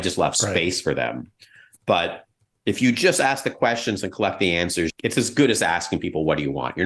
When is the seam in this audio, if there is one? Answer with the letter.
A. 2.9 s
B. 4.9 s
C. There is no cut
B